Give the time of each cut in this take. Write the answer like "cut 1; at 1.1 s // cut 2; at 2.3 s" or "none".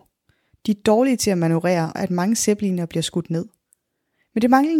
cut 1; at 2.0 s